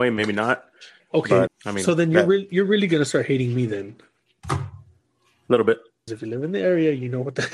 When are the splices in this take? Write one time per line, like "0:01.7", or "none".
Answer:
0:01.5
0:06.1